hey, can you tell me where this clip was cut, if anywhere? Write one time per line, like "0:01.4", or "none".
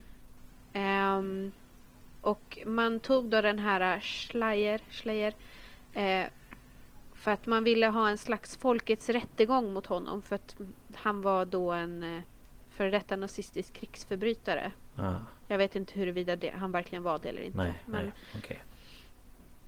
none